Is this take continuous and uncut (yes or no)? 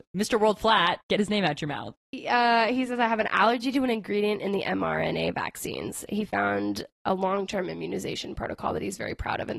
yes